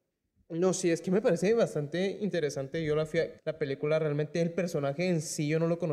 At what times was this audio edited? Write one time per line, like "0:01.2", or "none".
0:03.4